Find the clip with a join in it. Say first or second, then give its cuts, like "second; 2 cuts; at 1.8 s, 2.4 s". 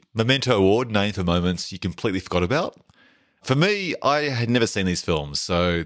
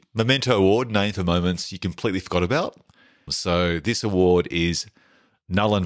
second; 1 cut; at 3.3 s